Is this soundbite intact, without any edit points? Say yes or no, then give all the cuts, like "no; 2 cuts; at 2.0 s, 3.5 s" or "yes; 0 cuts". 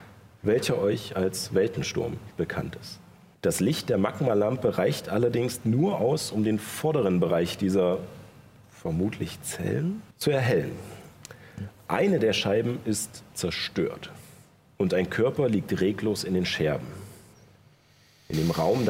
no; 2 cuts; at 3.3 s, 10.1 s